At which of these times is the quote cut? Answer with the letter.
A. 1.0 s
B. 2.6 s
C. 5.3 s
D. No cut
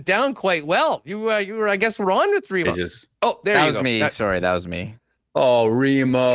B